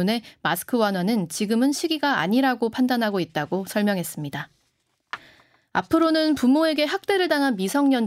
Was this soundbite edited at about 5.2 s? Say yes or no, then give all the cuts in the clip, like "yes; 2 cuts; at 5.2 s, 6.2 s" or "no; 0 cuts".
no; 0 cuts